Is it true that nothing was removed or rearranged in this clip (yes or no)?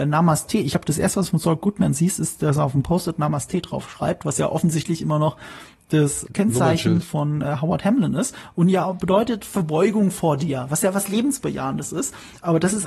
no